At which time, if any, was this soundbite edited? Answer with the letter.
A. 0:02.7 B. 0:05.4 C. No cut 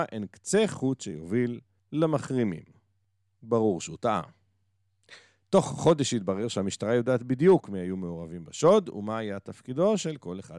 C